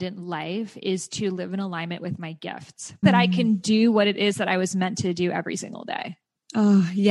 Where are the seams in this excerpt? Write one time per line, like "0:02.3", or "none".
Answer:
0:03.0